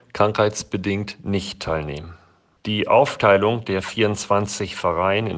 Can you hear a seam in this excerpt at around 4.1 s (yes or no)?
no